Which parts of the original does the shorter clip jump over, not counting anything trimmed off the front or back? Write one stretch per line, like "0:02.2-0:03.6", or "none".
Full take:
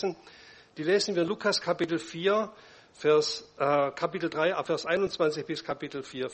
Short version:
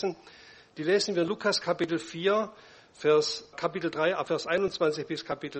0:03.5-0:03.9

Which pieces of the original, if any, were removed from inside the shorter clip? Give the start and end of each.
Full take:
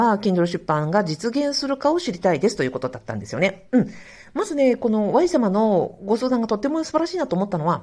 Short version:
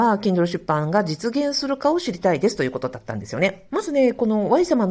0:03.7-0:04.3

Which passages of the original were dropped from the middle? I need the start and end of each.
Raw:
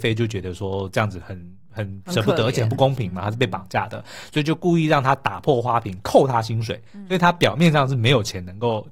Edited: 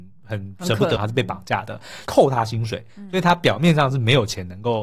0:02.4-0:03.2
0:04.3-0:06.0

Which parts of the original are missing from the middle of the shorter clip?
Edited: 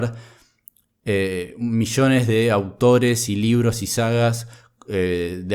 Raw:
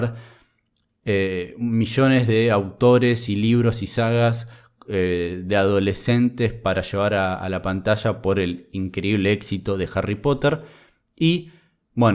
none

